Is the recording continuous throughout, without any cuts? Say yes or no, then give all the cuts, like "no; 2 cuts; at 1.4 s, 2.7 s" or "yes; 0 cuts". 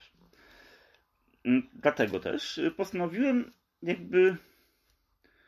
yes; 0 cuts